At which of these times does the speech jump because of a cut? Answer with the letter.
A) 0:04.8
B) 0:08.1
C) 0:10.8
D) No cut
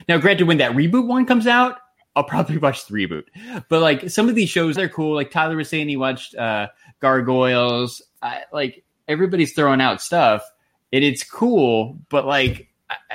A